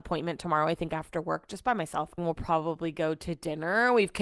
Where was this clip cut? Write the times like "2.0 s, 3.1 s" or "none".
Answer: 2.2 s